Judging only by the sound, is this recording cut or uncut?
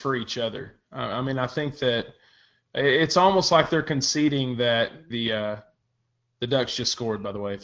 cut